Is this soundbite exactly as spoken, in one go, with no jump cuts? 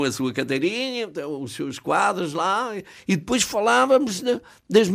yes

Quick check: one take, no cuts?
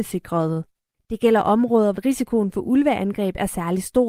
no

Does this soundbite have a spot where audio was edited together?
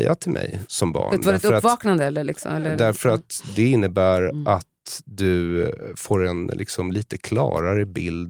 no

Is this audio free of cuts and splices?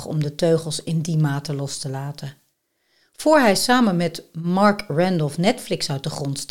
yes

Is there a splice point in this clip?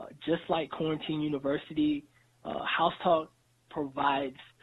no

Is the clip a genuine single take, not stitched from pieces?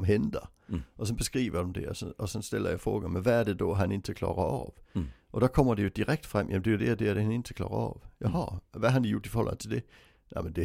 yes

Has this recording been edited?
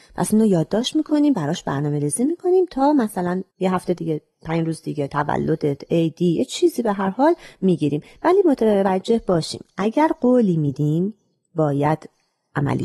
yes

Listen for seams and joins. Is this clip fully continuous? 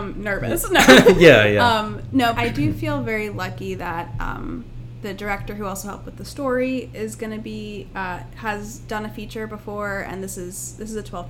no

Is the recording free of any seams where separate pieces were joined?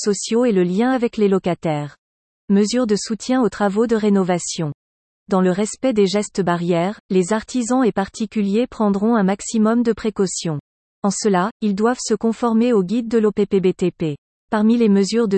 no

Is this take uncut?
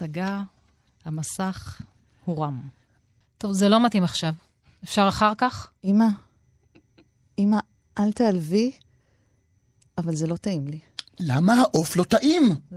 no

